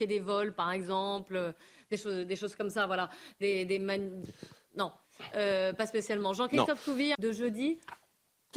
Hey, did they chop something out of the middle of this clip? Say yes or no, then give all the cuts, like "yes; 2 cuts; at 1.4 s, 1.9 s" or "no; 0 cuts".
yes; 1 cut; at 7.1 s